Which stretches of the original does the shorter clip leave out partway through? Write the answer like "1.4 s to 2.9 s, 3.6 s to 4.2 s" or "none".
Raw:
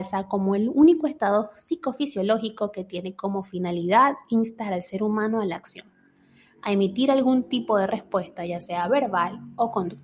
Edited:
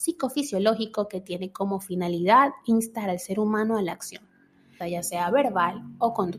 6.4 s to 8.4 s